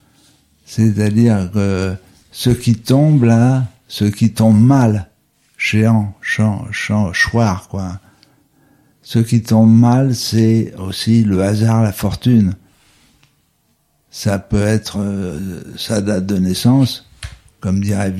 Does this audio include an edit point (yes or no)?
no